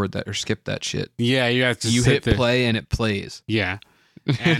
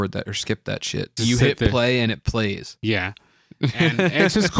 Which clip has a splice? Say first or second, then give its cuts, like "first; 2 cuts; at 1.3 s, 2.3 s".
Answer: second; 1 cut; at 1.2 s